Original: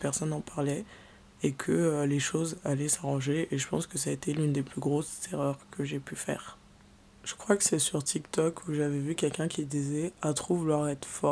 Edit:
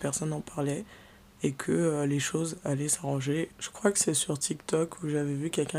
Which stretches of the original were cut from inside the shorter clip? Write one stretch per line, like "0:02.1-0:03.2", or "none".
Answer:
0:03.5-0:07.1

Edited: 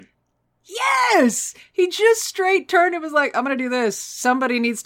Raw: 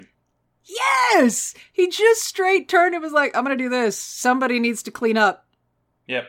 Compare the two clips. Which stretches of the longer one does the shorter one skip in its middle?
none

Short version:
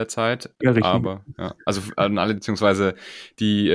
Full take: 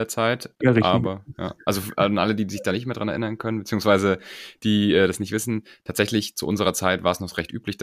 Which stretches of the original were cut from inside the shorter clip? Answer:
0:02.4-0:03.6

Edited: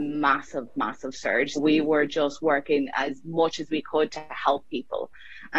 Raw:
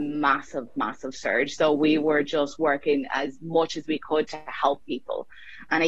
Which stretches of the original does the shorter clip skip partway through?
0:01.6-0:01.7

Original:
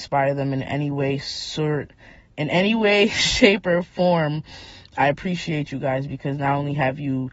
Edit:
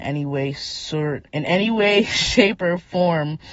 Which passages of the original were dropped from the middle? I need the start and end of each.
0:01.9-0:02.3

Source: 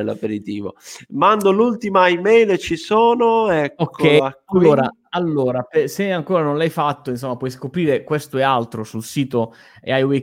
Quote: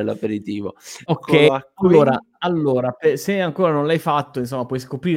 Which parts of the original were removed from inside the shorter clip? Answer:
0:01.1-0:03.8

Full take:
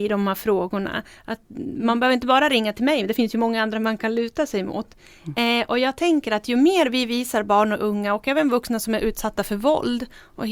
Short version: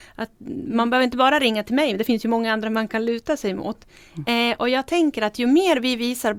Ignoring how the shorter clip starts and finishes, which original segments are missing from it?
none

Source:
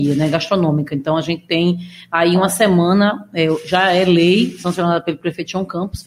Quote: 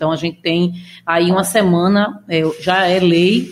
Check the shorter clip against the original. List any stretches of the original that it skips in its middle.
none

